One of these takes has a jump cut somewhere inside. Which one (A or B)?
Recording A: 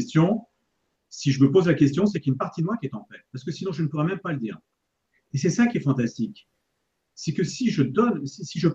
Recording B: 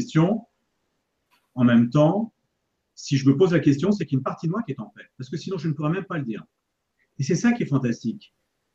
A